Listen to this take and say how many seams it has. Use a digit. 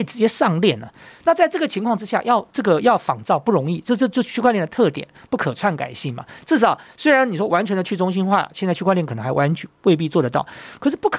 0